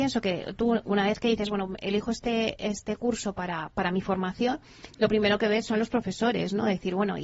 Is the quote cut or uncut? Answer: uncut